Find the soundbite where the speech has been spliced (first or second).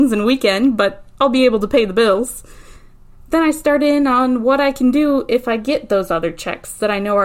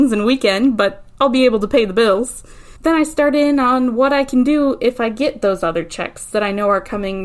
second